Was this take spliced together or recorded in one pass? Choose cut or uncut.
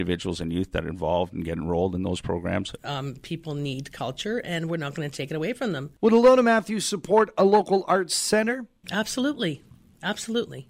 cut